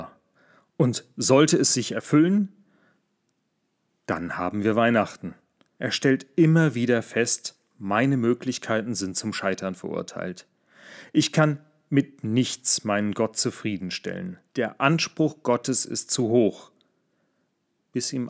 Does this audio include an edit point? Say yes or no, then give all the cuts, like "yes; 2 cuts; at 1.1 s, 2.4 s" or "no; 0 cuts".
yes; 2 cuts; at 5.8 s, 14.5 s